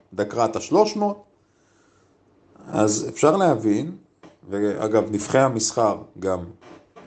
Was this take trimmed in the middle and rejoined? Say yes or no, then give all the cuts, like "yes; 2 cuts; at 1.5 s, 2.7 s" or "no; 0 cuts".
no; 0 cuts